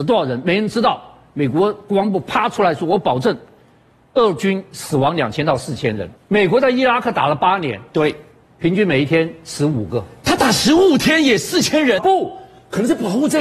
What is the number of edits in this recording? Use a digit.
2